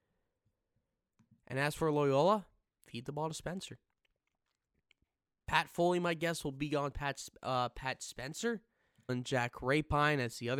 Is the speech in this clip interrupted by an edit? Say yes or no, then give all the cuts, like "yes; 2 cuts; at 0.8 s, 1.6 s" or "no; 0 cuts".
yes; 1 cut; at 9.1 s